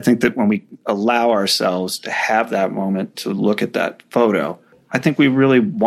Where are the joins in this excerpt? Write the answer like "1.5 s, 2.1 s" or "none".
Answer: none